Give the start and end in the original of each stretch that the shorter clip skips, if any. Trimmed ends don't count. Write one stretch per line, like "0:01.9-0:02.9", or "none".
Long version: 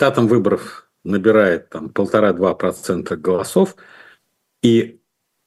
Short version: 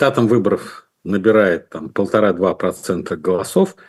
none